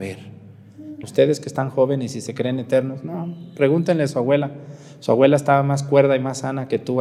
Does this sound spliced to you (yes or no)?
yes